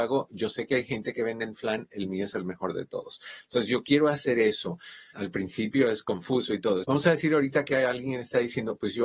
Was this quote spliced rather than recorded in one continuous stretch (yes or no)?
yes